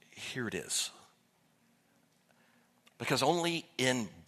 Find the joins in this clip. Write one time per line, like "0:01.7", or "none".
0:02.9